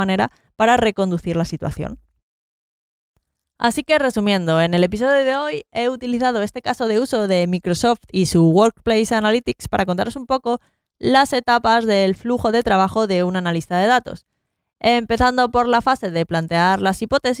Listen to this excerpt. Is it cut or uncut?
uncut